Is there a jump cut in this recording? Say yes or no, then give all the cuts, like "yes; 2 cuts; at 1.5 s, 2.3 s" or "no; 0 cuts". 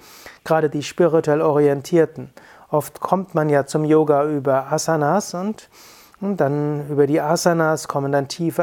no; 0 cuts